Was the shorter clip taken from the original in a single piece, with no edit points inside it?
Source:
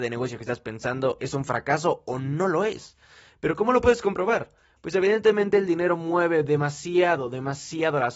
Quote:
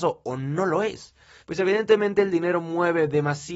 no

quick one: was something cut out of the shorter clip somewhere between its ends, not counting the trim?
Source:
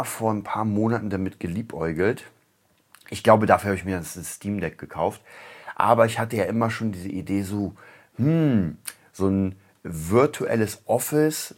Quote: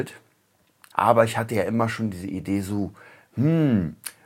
yes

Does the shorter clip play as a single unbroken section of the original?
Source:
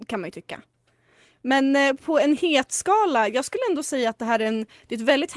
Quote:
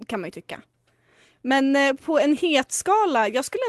yes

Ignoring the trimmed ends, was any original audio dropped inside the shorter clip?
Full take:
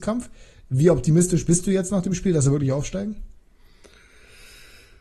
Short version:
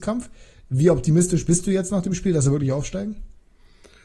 no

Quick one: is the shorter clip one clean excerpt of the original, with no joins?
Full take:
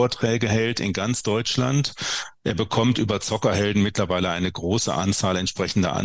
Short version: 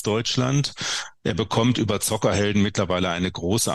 yes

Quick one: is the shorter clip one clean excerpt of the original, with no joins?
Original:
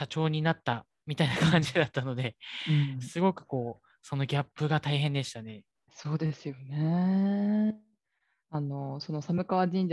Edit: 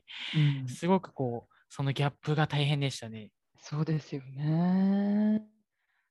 yes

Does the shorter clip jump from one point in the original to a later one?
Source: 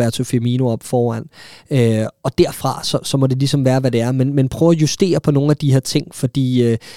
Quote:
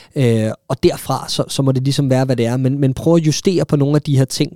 no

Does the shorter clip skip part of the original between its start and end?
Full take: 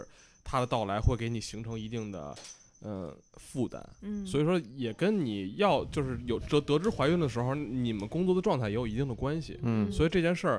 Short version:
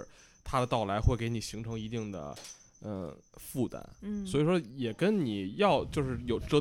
no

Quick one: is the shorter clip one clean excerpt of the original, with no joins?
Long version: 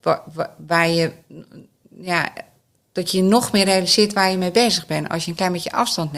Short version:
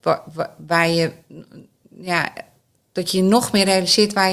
yes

